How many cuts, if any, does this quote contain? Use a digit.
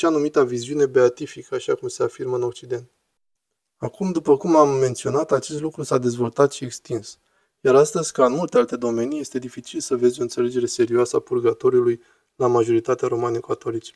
0